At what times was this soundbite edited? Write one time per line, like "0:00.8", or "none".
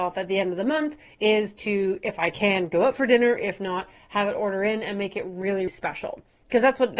0:05.7